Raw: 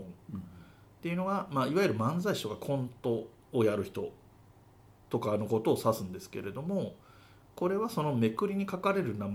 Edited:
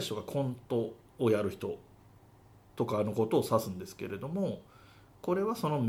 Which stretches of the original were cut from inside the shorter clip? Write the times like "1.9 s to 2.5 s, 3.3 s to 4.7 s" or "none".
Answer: none